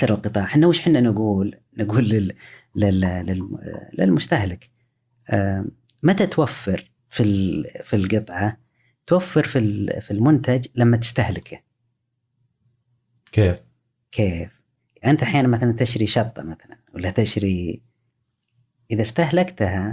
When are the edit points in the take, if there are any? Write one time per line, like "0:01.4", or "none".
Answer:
0:07.0

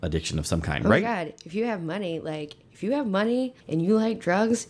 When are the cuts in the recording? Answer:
0:03.6

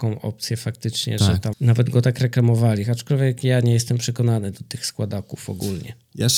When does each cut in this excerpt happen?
0:01.5

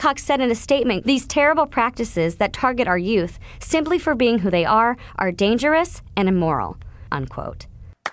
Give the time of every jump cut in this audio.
0:01.0
0:07.1

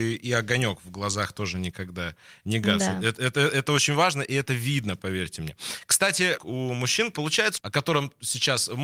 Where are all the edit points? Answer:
0:06.4
0:07.6

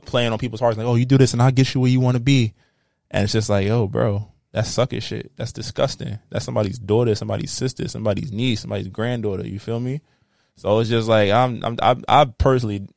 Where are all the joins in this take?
none

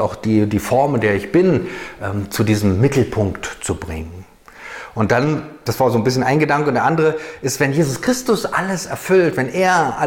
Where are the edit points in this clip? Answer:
none

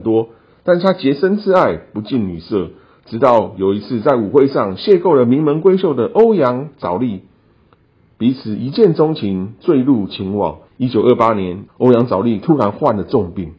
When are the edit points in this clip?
0:10.7
0:11.7

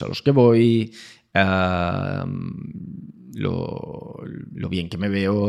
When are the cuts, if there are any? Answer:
none

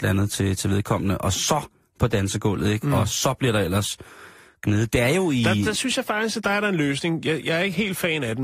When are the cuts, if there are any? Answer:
none

